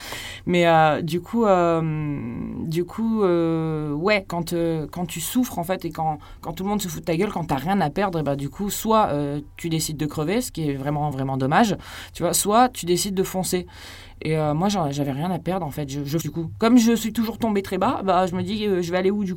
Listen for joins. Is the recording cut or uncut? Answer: cut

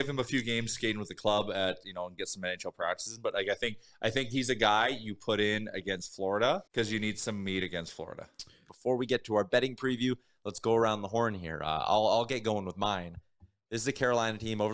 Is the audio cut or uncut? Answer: cut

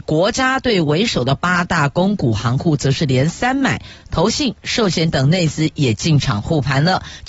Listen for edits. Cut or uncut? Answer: uncut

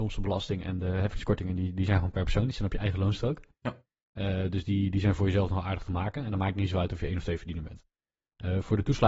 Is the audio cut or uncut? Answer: uncut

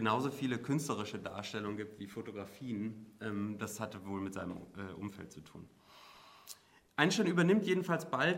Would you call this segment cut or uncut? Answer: uncut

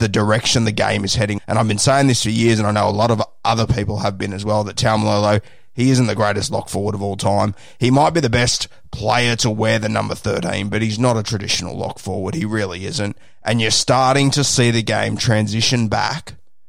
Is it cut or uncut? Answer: cut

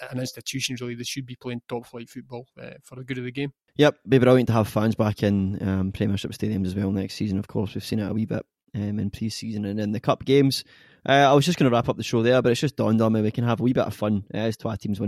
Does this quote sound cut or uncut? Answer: uncut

